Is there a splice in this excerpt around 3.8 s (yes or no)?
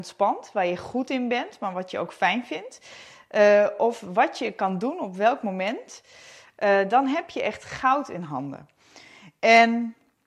no